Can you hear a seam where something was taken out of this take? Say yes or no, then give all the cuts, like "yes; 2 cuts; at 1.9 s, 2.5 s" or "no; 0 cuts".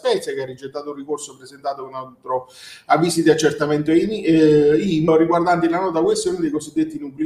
yes; 1 cut; at 5.1 s